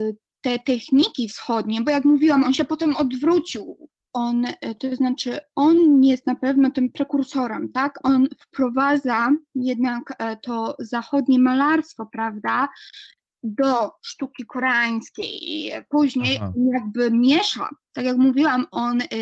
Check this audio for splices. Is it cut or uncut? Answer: cut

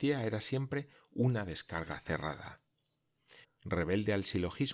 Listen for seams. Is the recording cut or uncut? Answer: cut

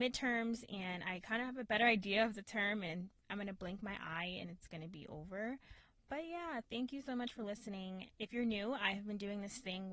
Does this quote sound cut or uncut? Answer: cut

